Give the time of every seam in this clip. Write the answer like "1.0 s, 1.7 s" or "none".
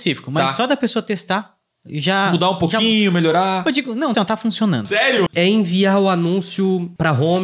4.1 s, 5.3 s